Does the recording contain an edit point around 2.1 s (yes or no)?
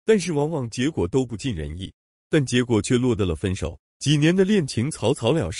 yes